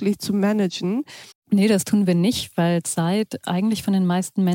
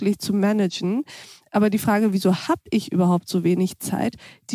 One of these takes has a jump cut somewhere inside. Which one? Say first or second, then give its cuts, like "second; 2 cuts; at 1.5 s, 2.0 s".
first; 1 cut; at 1.3 s